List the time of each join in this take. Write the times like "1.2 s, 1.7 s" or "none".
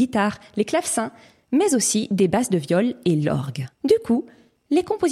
3.7 s